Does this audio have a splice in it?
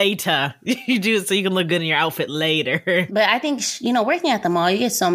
yes; 1 cut; at 3.1 s

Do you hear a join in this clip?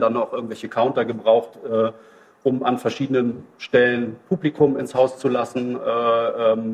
no; 0 cuts

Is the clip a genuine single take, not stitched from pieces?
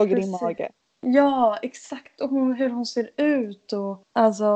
yes; 0 cuts

